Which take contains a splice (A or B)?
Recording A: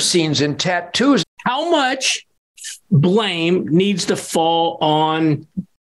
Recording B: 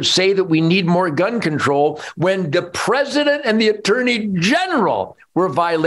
A